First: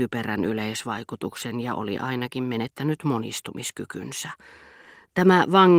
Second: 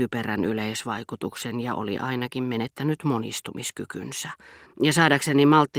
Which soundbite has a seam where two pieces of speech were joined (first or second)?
second